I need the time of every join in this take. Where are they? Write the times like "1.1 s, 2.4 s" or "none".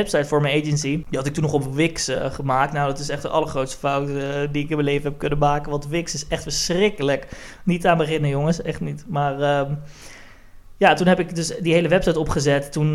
none